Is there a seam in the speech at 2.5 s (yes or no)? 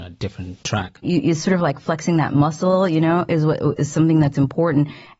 no